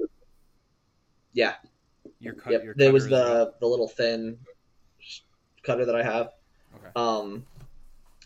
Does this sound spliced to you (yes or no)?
no